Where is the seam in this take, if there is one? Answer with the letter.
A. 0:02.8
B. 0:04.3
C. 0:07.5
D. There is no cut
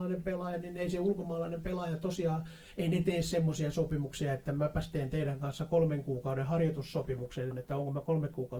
C